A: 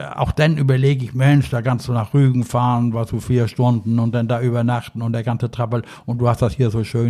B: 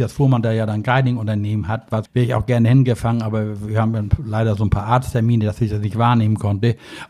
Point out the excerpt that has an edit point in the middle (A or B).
B